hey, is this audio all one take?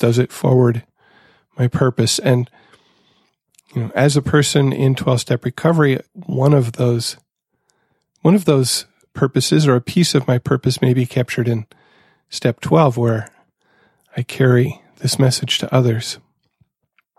yes; 0 cuts

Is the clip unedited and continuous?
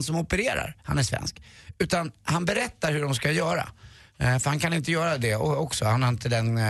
yes; 0 cuts

